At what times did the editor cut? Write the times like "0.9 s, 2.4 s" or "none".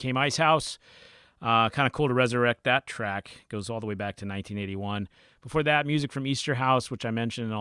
none

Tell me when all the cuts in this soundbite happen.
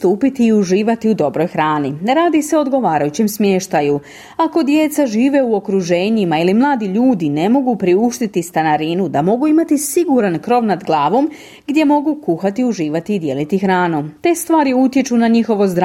none

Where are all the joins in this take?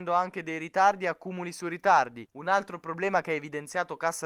2.3 s

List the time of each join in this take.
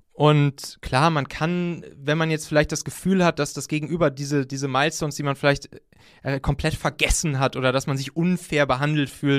none

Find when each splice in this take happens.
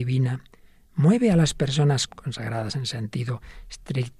2.1 s

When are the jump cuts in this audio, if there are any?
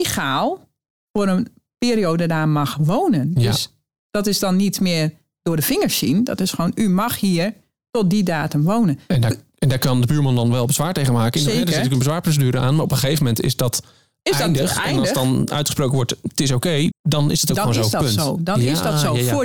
16.9 s

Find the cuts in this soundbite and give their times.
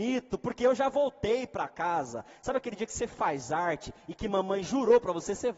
none

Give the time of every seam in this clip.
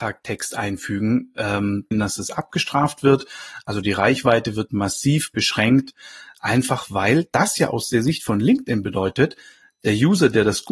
1.9 s

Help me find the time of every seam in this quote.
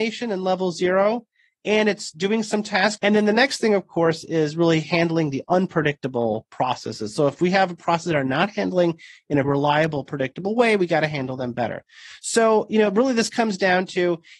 3.0 s, 9.4 s

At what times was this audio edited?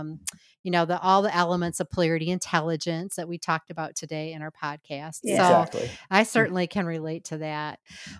5.2 s

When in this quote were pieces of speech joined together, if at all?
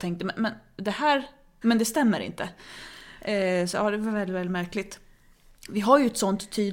1.6 s

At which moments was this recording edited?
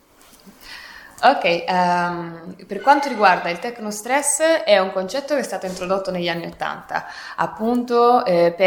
none

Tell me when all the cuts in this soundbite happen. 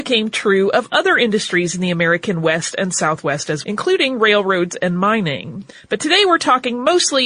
3.6 s

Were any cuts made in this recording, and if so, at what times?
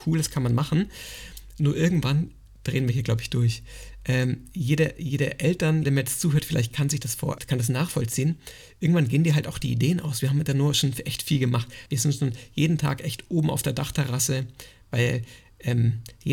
5.8 s, 7.4 s, 11.9 s

